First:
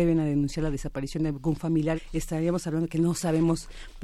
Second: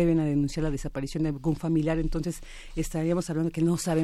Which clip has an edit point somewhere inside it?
first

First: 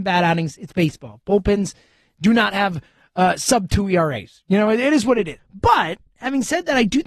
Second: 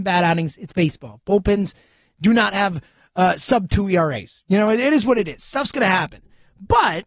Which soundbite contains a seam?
first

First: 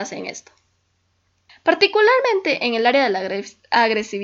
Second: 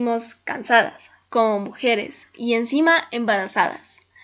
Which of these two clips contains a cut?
first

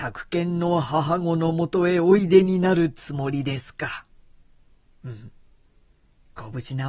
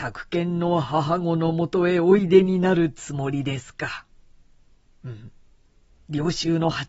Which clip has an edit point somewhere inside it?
second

